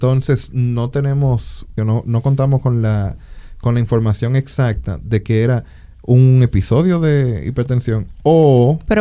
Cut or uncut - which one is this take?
cut